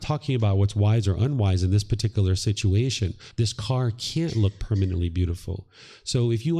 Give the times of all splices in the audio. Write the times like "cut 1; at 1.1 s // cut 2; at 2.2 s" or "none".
cut 1; at 3.3 s

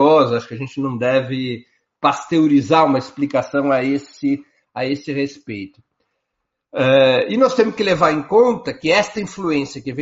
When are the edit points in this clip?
none

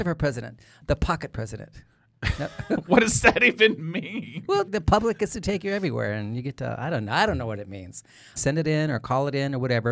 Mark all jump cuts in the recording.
cut 1; at 4.7 s // cut 2; at 8.4 s

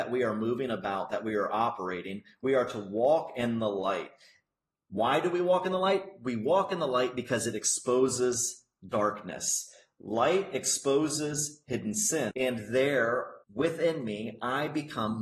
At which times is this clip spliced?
cut 1; at 12.3 s // cut 2; at 13.4 s

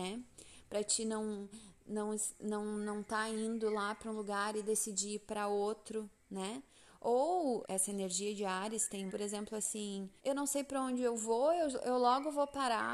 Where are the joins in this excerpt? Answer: cut 1; at 7.6 s // cut 2; at 9.1 s // cut 3; at 10.2 s

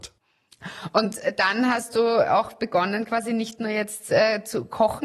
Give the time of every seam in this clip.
none

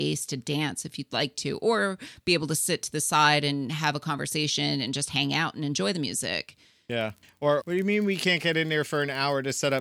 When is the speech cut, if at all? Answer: cut 1; at 7.6 s

